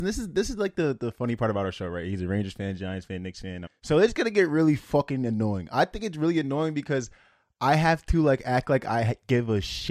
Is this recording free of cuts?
no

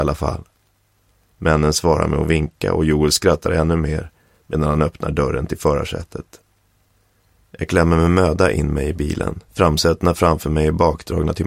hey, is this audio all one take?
no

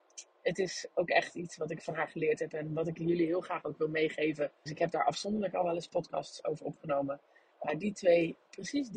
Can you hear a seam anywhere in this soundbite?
yes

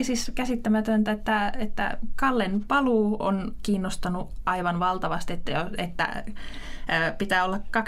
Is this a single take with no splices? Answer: yes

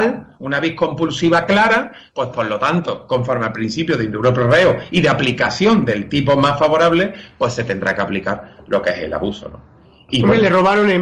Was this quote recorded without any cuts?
yes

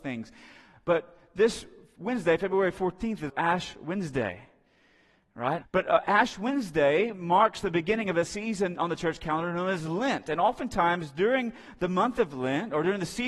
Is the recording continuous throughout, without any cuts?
no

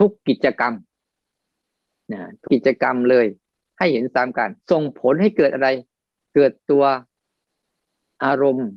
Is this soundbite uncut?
no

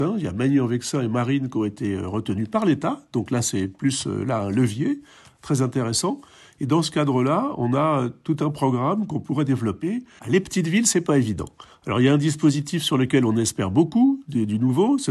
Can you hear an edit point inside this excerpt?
yes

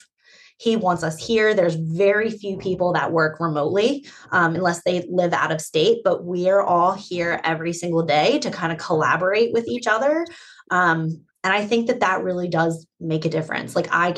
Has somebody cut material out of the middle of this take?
no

